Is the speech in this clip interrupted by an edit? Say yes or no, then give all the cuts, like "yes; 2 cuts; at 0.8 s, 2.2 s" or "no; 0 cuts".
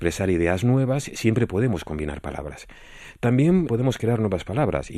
yes; 1 cut; at 3.7 s